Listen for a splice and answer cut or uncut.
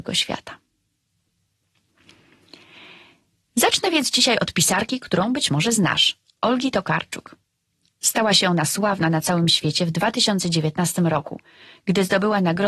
uncut